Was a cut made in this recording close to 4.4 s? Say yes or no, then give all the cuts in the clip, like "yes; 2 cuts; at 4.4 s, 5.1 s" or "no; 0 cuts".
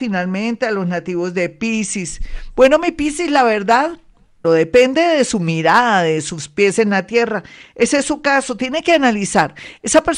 yes; 1 cut; at 4.4 s